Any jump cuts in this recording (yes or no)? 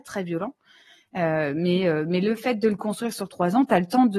no